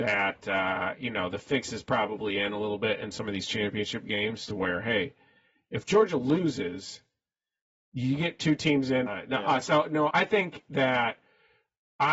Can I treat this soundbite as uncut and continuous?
no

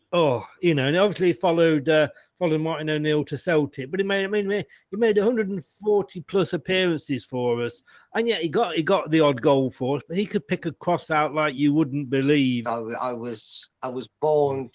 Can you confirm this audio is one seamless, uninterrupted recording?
no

